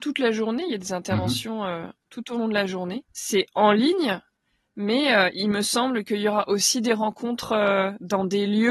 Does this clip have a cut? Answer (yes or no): yes